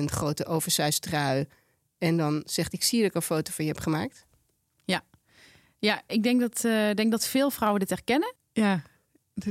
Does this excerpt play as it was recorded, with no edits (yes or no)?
no